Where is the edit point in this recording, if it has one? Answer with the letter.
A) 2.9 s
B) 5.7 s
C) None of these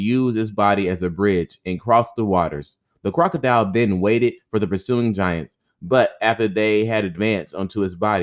C